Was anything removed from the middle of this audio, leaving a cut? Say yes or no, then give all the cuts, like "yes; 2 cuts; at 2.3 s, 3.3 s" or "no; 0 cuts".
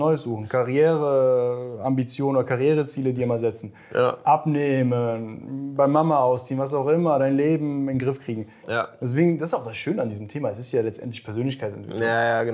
yes; 1 cut; at 8.6 s